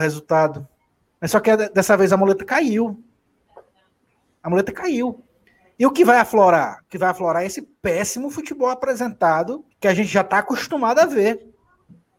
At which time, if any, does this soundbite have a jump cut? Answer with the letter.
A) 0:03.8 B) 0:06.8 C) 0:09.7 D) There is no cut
C